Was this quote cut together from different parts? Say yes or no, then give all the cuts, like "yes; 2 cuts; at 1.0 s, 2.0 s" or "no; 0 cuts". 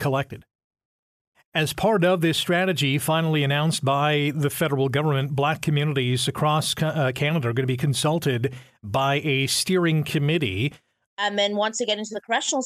yes; 2 cuts; at 1.3 s, 11.0 s